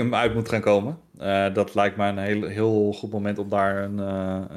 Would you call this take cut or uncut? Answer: uncut